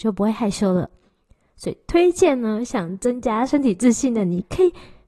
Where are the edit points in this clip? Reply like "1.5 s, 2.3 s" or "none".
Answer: none

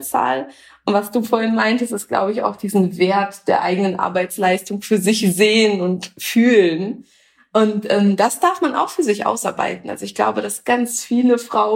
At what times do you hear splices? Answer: 10.6 s

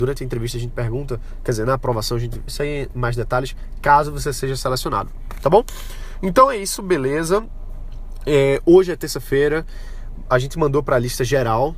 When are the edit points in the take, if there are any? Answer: 2.5 s

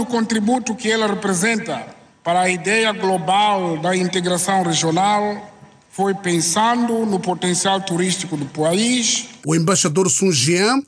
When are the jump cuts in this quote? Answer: 9.4 s

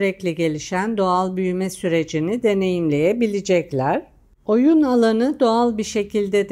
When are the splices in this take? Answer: none

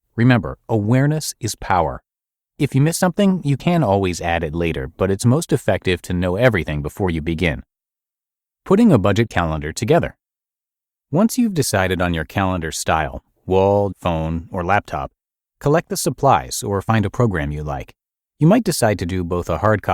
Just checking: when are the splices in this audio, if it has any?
13.9 s

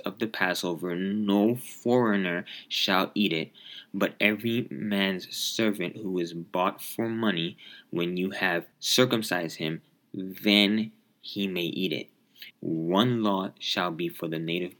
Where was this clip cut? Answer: 8.7 s, 12.5 s

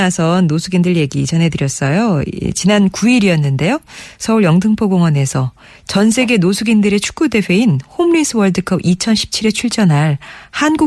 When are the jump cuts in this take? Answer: none

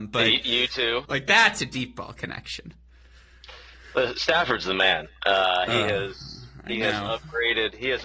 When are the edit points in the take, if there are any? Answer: 1.0 s

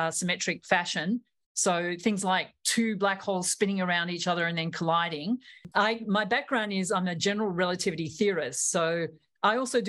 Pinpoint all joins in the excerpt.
5.7 s

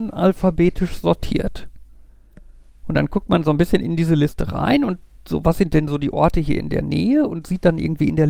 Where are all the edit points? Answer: none

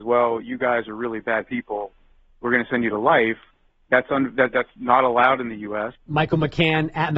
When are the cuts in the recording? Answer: 6.0 s

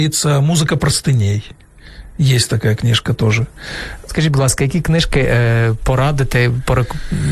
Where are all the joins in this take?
4.1 s

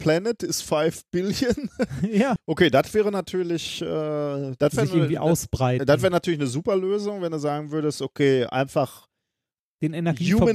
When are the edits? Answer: 2.4 s

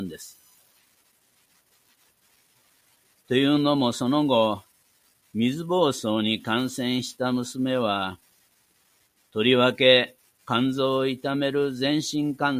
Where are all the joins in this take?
3.2 s

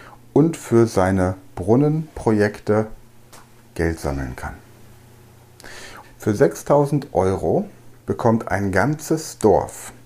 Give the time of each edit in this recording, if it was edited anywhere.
6.0 s, 8.0 s

